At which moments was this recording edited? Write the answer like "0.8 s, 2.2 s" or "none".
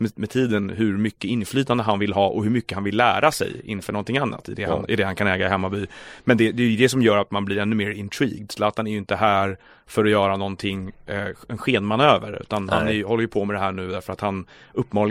4.4 s